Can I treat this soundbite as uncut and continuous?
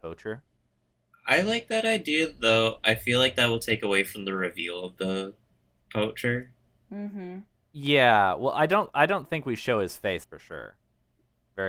no; 1 cut; at 10.2 s

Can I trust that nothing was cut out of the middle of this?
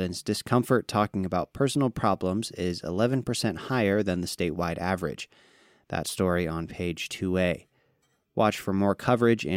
yes; 0 cuts

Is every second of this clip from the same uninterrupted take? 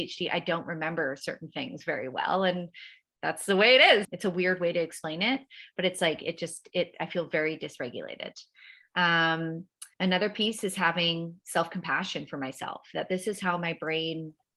no; 2 cuts; at 4.0 s, 9.9 s

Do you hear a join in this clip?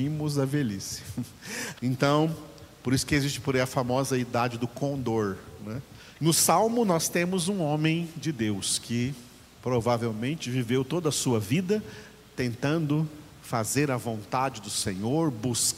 yes; 2 cuts; at 1.8 s, 6.2 s

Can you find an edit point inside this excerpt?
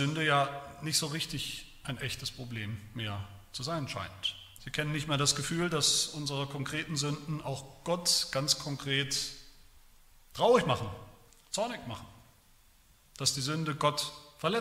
yes; 2 cuts; at 4.6 s, 11.3 s

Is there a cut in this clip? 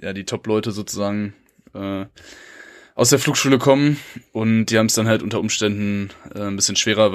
no; 0 cuts

